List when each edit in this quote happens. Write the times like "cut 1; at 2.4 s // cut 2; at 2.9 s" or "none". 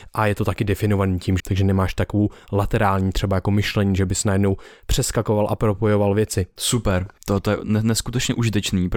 cut 1; at 1.4 s // cut 2; at 6.6 s